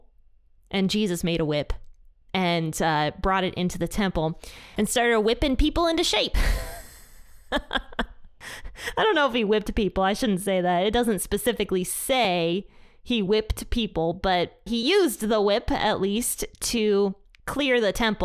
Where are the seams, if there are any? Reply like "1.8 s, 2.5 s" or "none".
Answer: 14.7 s